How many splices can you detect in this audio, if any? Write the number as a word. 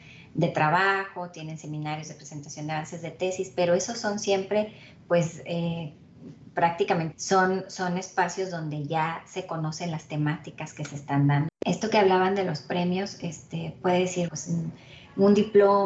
three